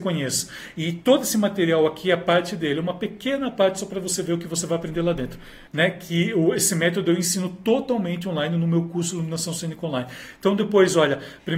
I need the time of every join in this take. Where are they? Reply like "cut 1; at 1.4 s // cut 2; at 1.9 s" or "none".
cut 1; at 5.7 s

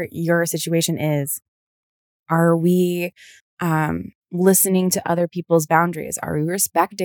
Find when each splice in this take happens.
cut 1; at 2.2 s // cut 2; at 4.2 s

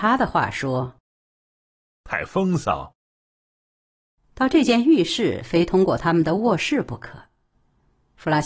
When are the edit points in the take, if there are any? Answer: none

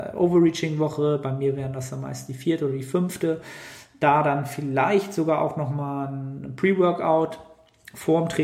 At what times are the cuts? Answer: none

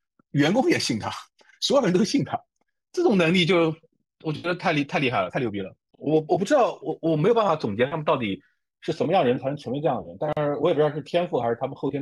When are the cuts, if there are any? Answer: none

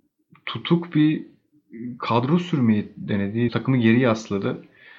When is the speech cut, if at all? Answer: cut 1; at 3.5 s

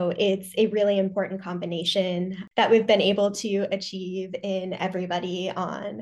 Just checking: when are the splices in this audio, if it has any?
none

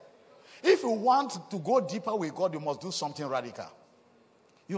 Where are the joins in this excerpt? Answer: none

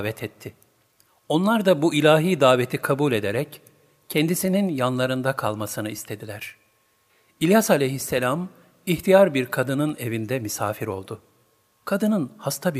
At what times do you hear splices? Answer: none

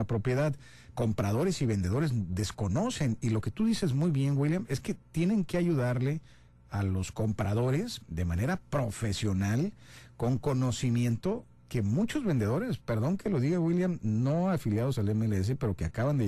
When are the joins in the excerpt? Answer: cut 1; at 0.9 s

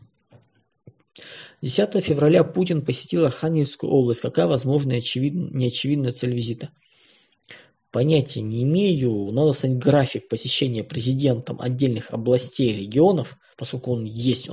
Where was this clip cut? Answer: none

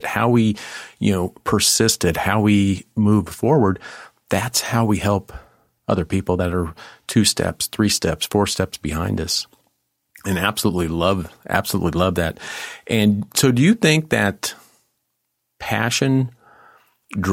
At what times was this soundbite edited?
none

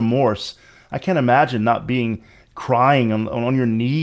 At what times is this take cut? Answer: none

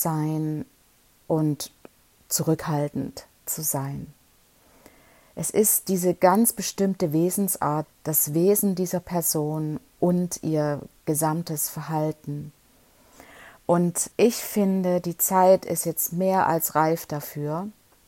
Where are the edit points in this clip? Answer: cut 1; at 7.8 s // cut 2; at 14.1 s

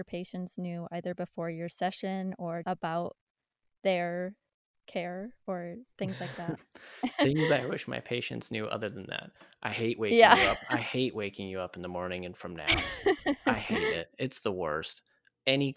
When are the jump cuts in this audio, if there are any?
cut 1; at 2.6 s

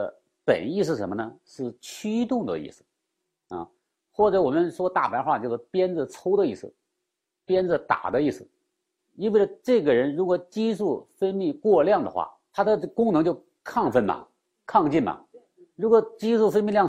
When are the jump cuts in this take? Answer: cut 1; at 9.0 s

